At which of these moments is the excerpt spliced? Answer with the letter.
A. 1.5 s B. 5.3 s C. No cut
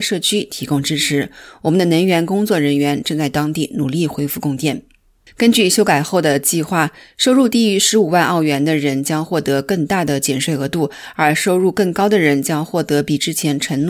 B